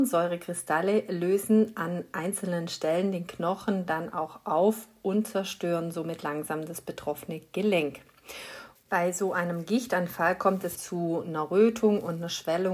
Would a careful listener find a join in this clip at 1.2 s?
no; 2 cuts; at 8.8 s, 10.8 s

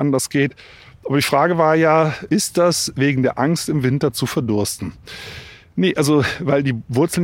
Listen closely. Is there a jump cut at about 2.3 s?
yes; 1 cut; at 2.3 s

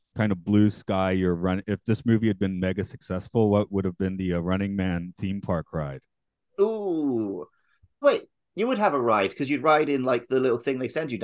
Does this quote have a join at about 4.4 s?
no; 1 cut; at 8.0 s

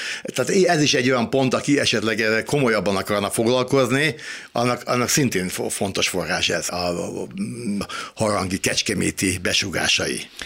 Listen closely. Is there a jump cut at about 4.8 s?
no; 2 cuts; at 6.7 s, 7.8 s

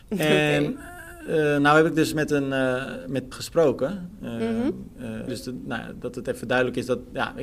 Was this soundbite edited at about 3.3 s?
yes; 2 cuts; at 3.3 s, 5.3 s

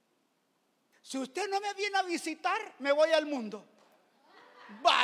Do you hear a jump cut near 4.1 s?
no; 1 cut; at 0.9 s

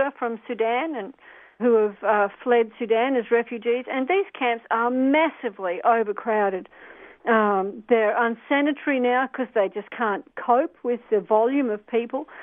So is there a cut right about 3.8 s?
no; 1 cut; at 1.6 s

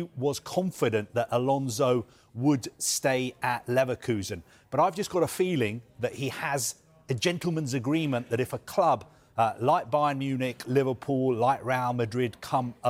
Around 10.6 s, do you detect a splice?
yes; 1 cut; at 10.6 s

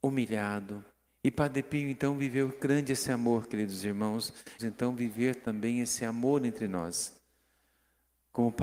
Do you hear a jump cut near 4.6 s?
yes; 2 cuts; at 1.1 s, 4.6 s

